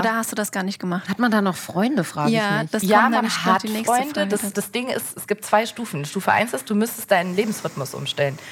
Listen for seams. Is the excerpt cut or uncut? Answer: cut